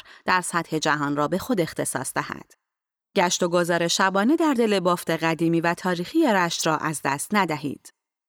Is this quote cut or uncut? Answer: cut